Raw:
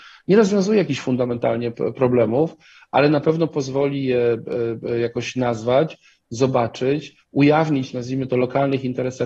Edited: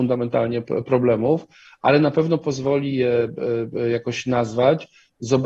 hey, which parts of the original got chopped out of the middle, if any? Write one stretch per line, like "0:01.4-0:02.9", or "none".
none